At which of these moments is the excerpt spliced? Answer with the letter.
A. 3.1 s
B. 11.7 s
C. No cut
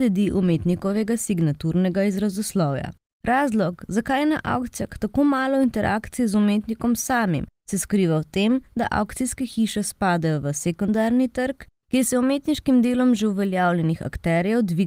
A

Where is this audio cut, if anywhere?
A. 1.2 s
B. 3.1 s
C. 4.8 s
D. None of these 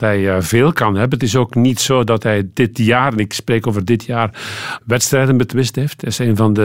C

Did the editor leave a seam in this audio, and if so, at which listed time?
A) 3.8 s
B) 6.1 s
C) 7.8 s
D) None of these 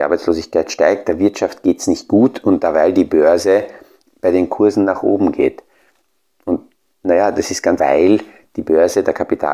C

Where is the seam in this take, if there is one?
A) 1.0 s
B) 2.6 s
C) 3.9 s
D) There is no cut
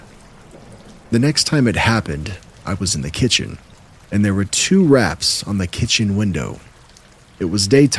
C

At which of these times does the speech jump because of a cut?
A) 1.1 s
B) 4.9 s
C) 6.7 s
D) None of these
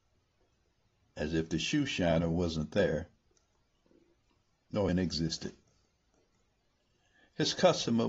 B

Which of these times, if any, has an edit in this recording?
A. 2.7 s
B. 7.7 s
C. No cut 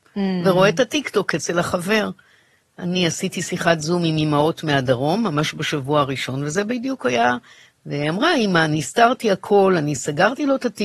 B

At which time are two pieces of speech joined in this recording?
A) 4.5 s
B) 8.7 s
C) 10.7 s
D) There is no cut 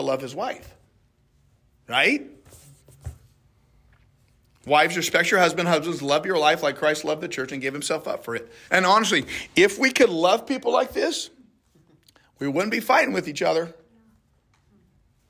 B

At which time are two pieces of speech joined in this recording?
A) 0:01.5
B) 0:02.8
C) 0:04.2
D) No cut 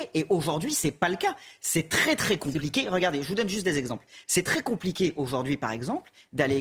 D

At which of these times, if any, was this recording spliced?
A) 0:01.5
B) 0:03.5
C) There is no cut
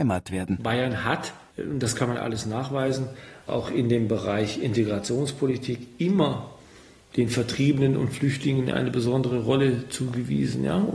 B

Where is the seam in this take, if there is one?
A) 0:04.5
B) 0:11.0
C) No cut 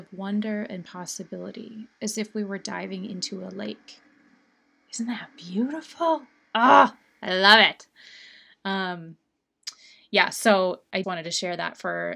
B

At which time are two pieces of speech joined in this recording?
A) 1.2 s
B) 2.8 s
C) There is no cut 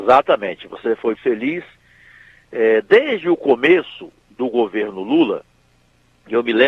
A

